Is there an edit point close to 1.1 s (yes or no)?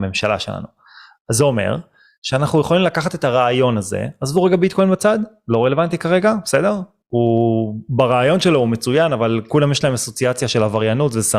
no